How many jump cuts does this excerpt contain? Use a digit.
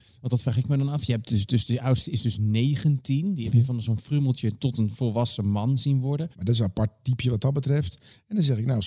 1